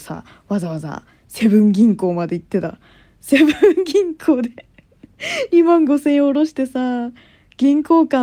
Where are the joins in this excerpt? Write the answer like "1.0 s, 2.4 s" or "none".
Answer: none